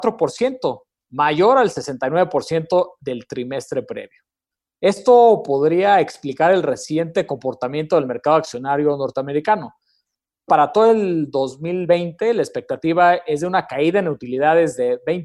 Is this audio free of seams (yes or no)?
no